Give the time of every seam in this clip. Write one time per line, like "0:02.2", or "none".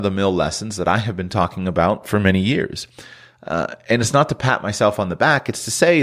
none